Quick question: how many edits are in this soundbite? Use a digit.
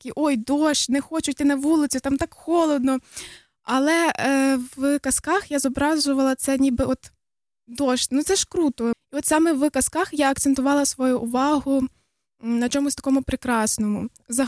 1